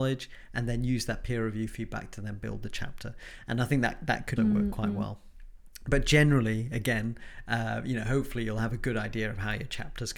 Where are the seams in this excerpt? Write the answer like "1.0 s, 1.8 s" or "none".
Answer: 4.4 s